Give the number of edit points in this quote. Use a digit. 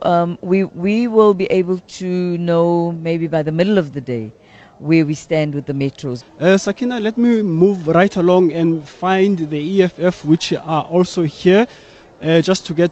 1